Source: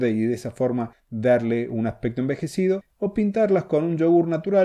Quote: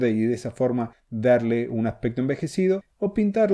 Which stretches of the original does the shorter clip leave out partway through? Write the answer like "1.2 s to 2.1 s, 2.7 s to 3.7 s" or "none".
none